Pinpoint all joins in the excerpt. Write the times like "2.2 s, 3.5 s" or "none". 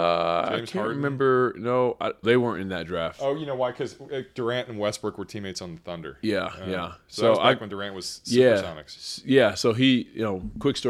2.2 s

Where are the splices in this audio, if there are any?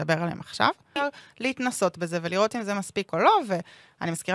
1.0 s

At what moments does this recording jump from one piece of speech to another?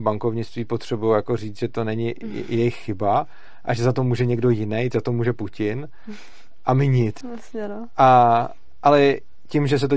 4.9 s, 7.2 s

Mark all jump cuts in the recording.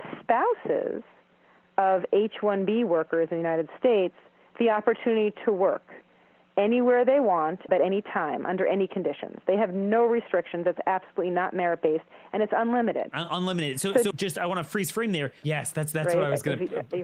7.7 s, 14.1 s, 15.4 s

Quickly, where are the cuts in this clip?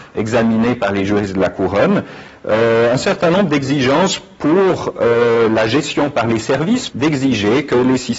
6.9 s

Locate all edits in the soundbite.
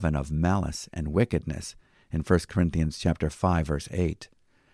none

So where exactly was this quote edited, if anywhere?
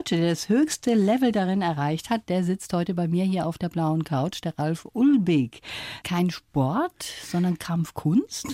6.0 s

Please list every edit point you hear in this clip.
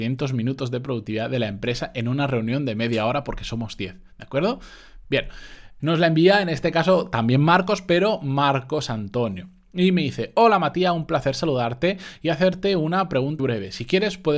5.8 s, 13.4 s

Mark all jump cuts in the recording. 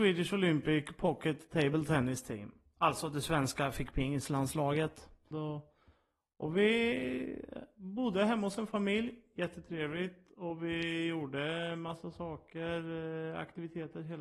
5.3 s

